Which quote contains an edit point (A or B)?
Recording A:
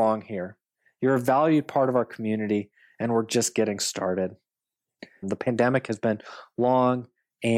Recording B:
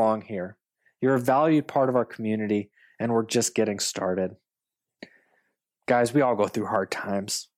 A